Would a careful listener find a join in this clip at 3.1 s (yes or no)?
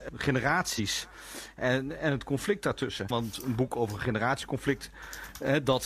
yes